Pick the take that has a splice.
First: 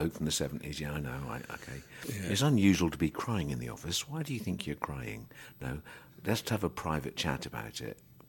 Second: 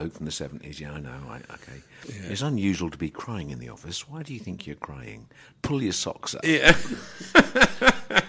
second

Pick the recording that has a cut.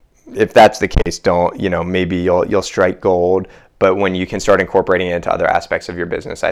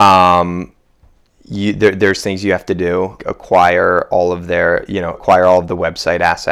second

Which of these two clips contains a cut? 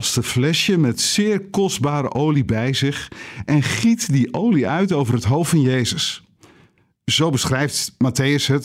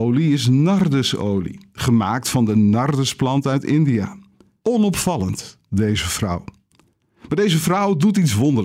second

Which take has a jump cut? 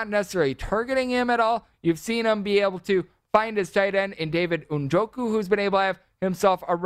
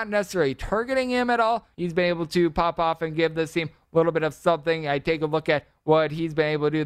second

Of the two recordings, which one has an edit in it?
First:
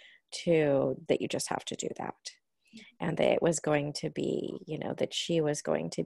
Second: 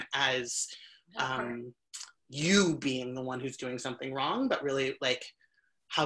first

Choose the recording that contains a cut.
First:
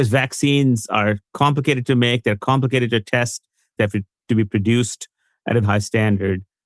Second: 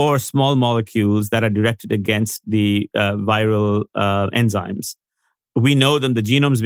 first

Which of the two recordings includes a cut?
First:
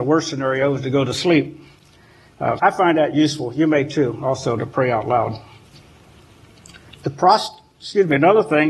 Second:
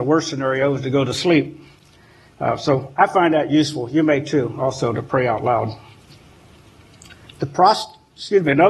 first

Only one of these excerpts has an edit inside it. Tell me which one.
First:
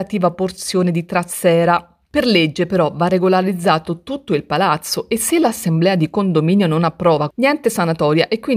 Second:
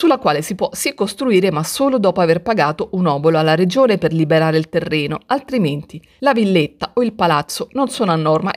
first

